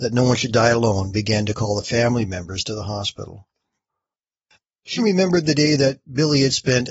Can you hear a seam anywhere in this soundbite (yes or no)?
yes